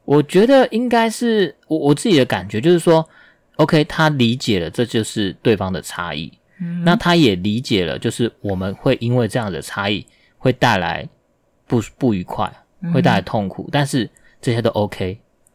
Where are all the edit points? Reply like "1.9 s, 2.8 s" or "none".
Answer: none